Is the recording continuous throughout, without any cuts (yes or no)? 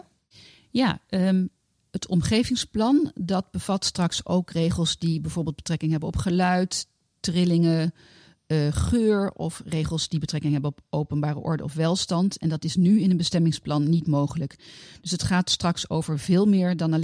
yes